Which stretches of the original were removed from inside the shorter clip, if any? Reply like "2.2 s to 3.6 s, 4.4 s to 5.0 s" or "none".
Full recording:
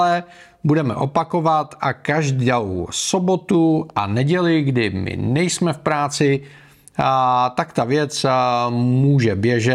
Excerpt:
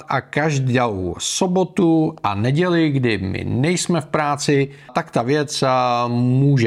6.6 s to 7.5 s